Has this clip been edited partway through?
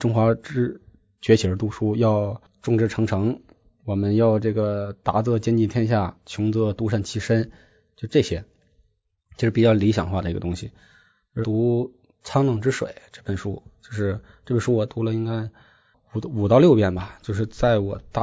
yes; 1 cut; at 11.4 s

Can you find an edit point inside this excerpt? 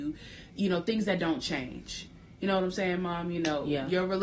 no; 0 cuts

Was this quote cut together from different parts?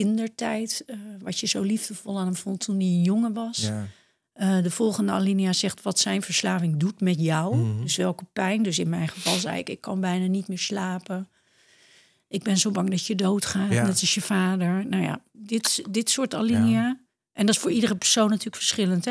no; 0 cuts

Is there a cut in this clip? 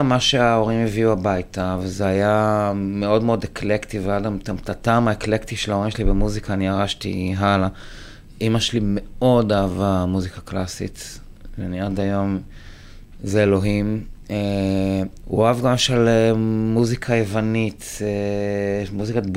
yes; 2 cuts; at 13.2 s, 15.2 s

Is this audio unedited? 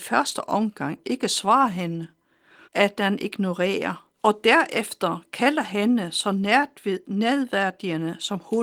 no; 2 cuts; at 2.6 s, 4.1 s

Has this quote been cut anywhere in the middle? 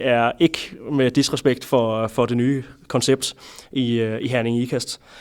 no; 0 cuts

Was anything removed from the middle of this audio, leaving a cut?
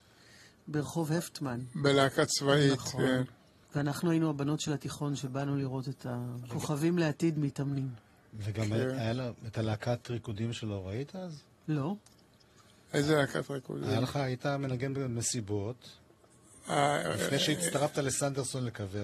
no; 0 cuts

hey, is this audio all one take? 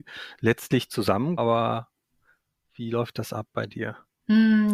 no; 1 cut; at 1.4 s

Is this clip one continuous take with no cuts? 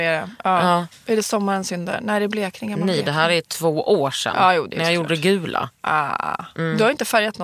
no; 1 cut; at 4.7 s

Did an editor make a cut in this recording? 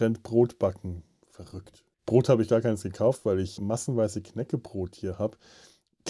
yes; 2 cuts; at 1.9 s, 3.6 s

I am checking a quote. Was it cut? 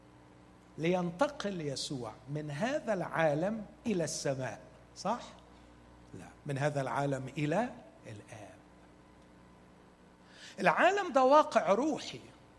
yes; 2 cuts; at 6.4 s, 8.0 s

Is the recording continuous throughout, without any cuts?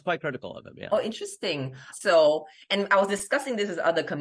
no; 1 cut; at 1.9 s

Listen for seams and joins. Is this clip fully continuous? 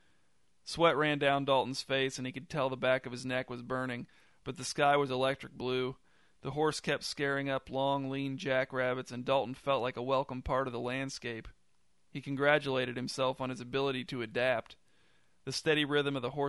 yes; 0 cuts

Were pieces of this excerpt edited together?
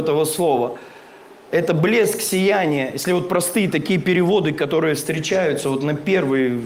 no; 0 cuts

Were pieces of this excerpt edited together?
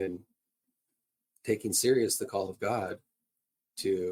no; 0 cuts

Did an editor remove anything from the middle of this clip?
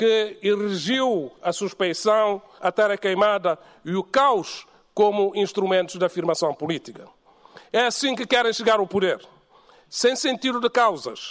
yes; 1 cut; at 2.6 s

